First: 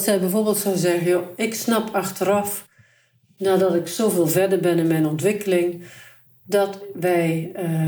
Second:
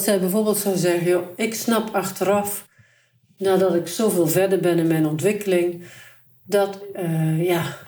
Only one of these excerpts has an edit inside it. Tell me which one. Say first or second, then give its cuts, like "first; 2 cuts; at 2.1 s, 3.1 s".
second; 1 cut; at 6.9 s